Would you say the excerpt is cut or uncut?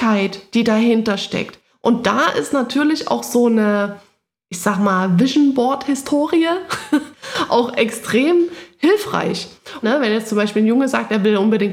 cut